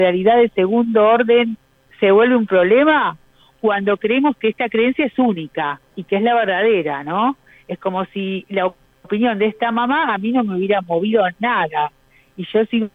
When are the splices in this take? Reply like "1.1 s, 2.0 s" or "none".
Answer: none